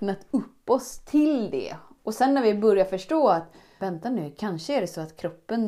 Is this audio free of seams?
no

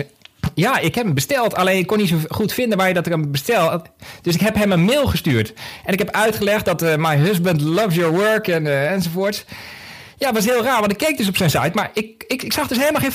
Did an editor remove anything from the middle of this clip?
no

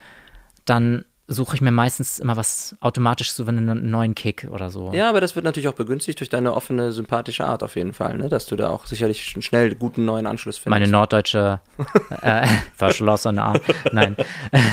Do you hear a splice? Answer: no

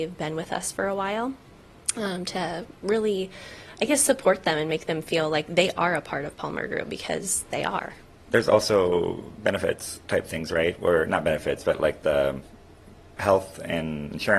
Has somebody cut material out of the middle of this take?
no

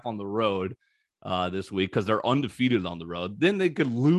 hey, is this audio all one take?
yes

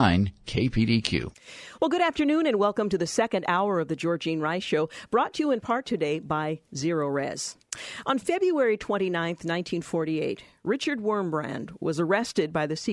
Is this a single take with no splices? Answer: yes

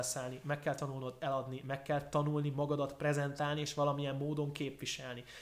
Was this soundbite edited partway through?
no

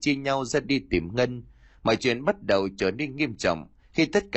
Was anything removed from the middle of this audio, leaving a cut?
no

